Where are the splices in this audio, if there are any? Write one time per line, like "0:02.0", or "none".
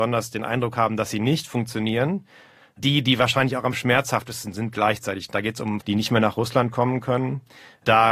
0:05.8